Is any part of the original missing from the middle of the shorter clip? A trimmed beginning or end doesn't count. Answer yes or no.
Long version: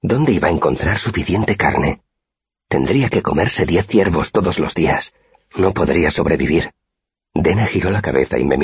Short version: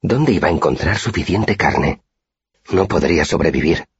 yes